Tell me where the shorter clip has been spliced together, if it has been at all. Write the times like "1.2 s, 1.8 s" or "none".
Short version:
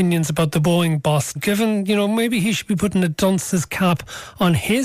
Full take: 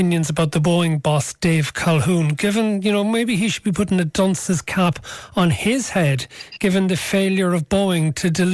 1.4 s